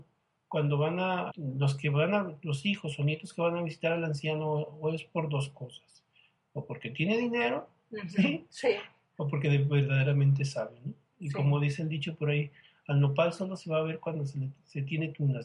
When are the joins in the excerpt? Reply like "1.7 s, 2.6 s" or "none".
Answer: 1.3 s